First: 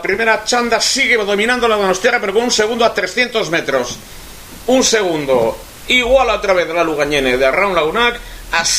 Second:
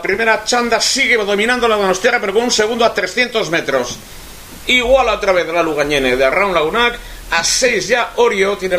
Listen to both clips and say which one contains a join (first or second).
second